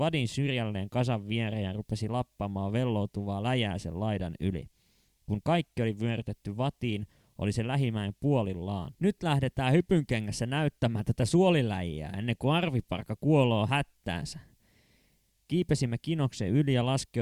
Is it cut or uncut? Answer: cut